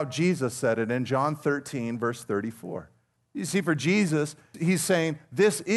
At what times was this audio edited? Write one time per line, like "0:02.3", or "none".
0:03.2
0:04.5